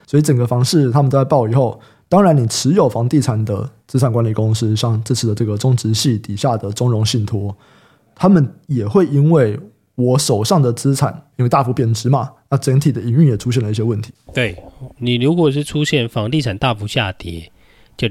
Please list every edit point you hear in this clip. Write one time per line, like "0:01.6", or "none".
0:15.0